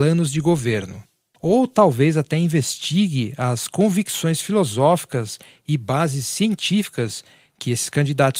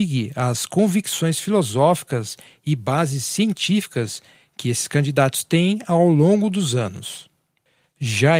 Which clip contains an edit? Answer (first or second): first